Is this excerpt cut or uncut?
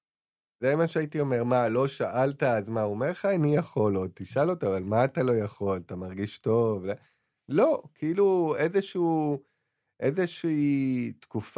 uncut